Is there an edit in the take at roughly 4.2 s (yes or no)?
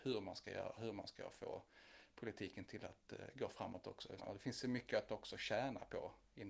yes